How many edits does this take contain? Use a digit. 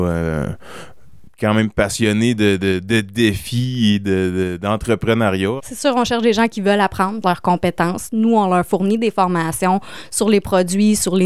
2